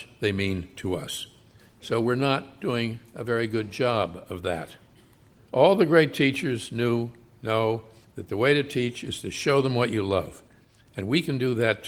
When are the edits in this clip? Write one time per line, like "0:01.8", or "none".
0:01.6
0:05.4

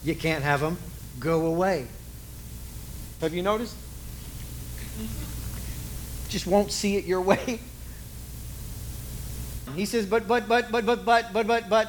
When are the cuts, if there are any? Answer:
0:03.2
0:09.7

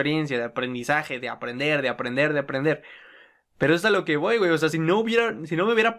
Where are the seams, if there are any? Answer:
none

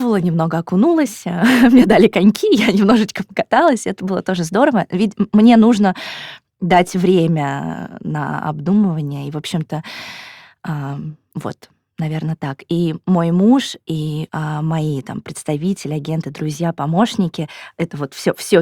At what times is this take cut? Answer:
0:14.3

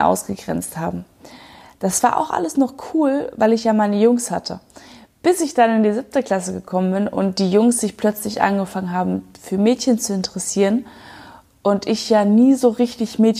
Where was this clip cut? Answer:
none

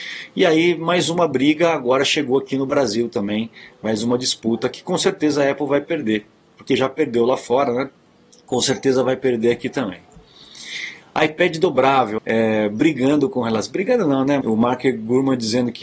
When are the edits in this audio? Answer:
0:12.2
0:14.4

